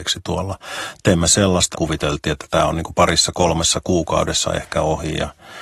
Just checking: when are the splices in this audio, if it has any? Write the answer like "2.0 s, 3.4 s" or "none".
1.7 s